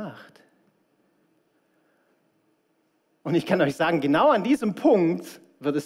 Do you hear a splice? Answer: no; 0 cuts

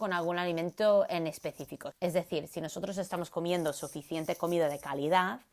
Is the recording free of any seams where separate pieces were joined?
no; 1 cut; at 1.9 s

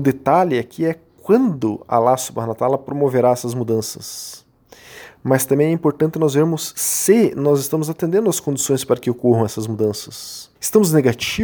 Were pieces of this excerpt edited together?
yes; 1 cut; at 10.5 s

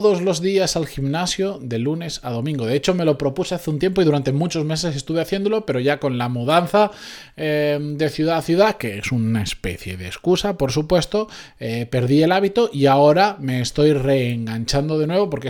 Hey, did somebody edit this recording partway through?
no; 0 cuts

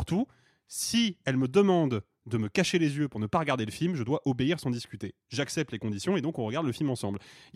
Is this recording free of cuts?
yes; 0 cuts

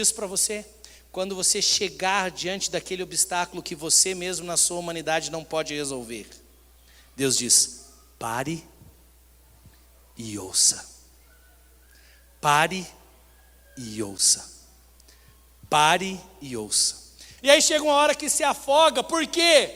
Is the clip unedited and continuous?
no; 1 cut; at 17.4 s

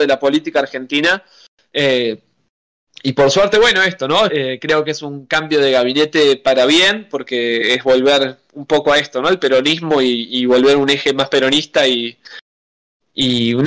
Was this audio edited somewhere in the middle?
yes; 1 cut; at 4.3 s

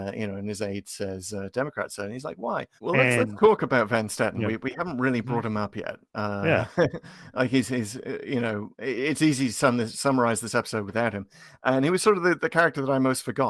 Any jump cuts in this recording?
yes; 1 cut; at 2.8 s

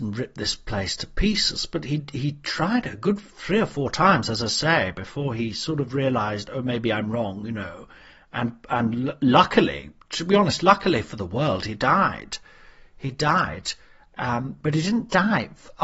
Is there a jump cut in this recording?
no; 0 cuts

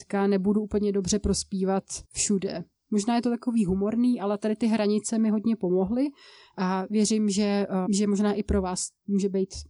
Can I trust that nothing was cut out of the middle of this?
no; 2 cuts; at 2.0 s, 7.9 s

